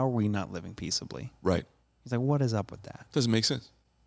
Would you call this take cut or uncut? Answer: uncut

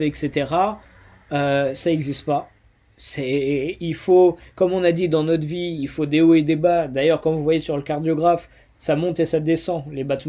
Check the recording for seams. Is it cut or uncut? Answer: uncut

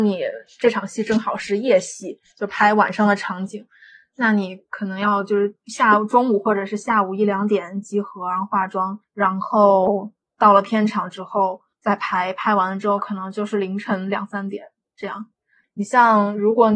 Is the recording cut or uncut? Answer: cut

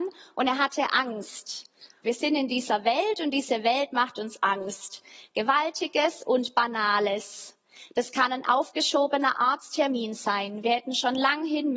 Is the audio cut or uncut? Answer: cut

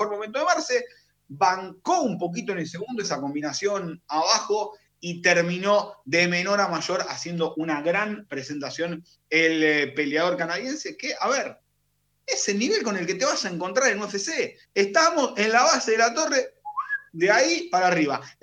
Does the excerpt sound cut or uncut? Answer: cut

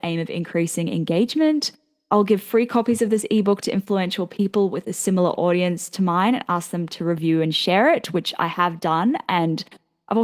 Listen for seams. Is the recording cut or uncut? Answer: uncut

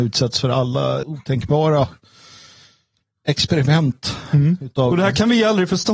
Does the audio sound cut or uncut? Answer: cut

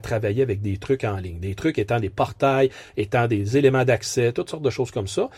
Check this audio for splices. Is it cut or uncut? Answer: uncut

